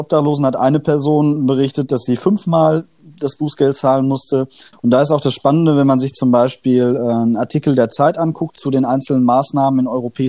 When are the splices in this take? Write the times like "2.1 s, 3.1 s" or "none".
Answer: 4.7 s